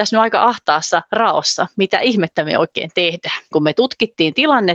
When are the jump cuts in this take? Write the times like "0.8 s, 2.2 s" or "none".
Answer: 3.5 s